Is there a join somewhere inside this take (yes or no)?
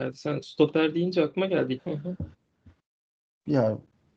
yes